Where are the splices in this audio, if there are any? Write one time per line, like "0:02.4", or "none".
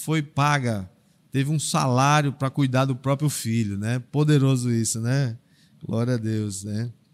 none